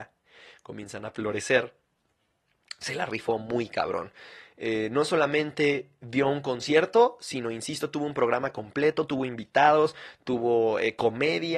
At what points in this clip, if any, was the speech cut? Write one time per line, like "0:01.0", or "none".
none